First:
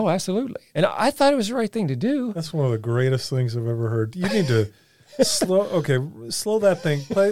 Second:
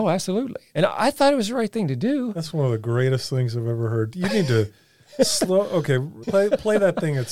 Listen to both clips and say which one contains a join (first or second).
second